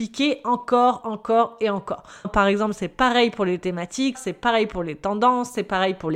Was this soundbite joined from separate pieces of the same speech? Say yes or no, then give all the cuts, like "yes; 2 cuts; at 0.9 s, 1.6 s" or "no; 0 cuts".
yes; 3 cuts; at 1.0 s, 2.2 s, 4.1 s